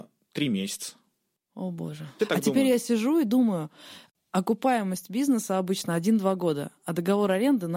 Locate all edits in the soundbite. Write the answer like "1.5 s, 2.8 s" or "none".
2.2 s